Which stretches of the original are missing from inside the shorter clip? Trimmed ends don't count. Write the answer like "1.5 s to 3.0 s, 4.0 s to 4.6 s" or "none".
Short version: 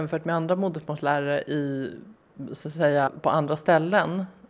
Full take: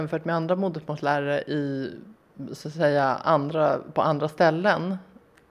3.1 s to 3.8 s